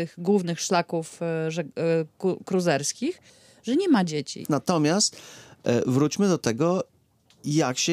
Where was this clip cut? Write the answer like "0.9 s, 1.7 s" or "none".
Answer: 4.5 s